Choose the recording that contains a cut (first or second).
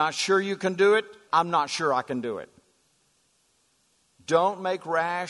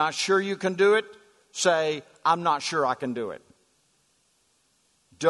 first